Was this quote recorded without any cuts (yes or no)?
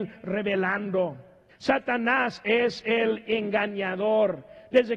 no